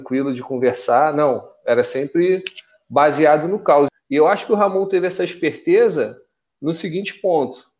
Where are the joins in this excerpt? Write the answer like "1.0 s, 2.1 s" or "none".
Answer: 3.9 s

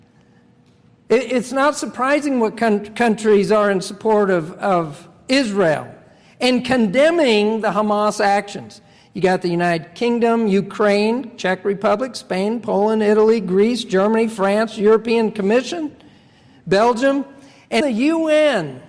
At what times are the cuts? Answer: 17.8 s

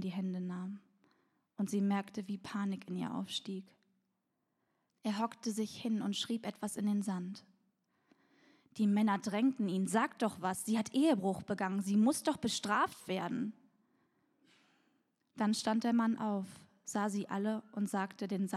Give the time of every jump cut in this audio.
4.9 s

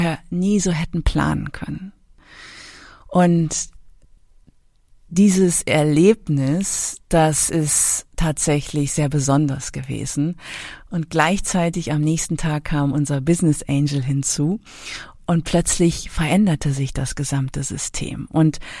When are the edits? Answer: 15.2 s

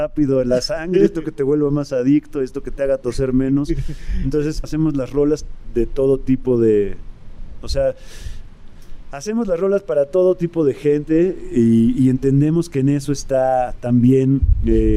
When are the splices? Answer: 4.6 s

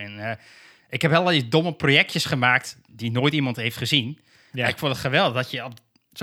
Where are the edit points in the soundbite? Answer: 2.9 s

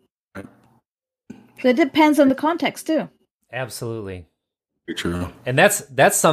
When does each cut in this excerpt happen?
none

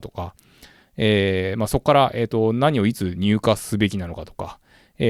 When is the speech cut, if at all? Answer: none

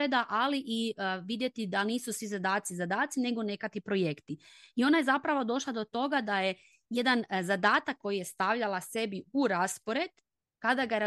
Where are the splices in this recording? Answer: none

